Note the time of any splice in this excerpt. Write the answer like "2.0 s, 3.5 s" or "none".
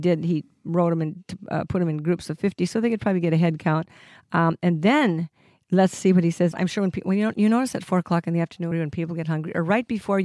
6.5 s, 8.7 s